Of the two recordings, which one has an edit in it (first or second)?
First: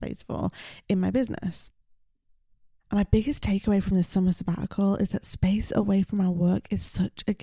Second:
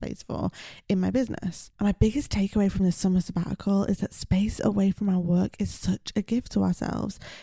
second